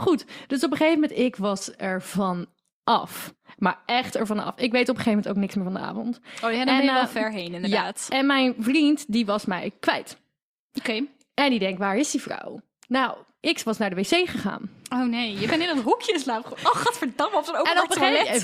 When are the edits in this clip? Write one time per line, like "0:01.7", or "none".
none